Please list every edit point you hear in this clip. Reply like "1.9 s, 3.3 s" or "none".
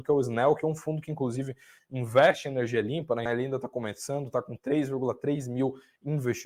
3.3 s